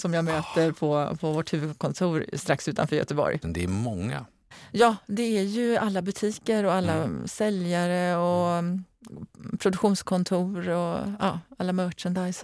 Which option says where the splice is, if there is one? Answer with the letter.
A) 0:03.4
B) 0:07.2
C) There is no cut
A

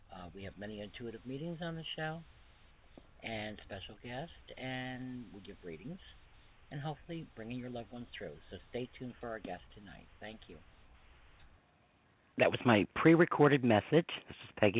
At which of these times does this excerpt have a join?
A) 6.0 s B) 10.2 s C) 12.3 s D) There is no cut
C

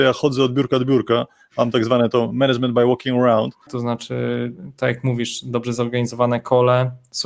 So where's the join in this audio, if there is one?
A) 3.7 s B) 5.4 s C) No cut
A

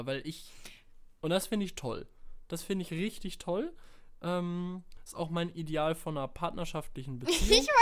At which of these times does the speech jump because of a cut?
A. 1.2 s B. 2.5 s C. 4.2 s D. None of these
A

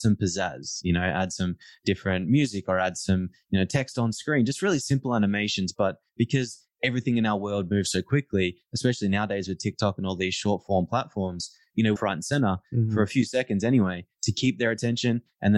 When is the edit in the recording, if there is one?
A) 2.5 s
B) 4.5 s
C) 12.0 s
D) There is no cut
C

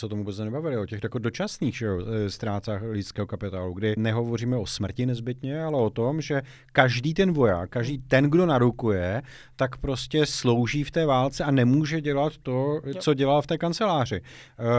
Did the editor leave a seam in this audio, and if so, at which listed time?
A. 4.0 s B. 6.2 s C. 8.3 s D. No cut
A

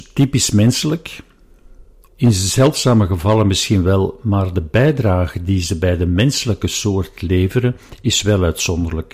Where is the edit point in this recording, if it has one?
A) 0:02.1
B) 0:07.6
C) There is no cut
A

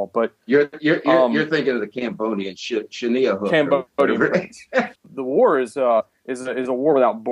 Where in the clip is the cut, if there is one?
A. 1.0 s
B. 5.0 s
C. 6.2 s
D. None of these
B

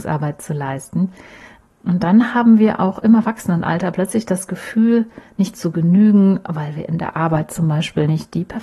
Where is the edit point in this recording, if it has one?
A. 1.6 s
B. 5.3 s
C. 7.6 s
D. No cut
A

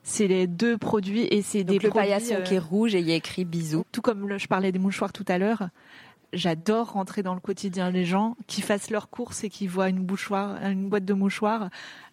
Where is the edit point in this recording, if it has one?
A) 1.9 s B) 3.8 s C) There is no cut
B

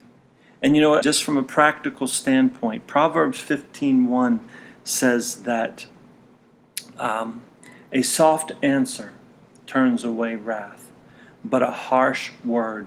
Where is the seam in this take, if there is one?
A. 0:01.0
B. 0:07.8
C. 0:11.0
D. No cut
A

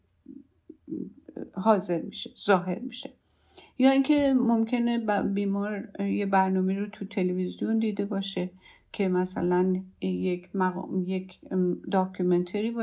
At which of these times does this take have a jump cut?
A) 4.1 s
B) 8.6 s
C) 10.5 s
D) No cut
D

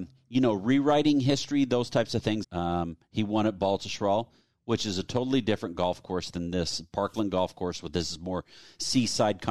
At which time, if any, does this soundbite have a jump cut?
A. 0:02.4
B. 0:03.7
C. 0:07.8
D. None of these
A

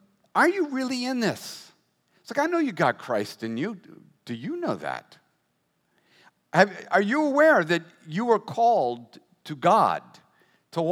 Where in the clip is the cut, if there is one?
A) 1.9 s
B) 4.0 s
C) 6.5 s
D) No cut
D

